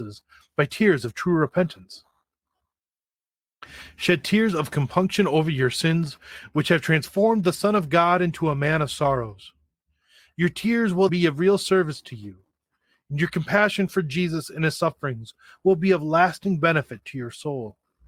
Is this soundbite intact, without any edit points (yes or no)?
no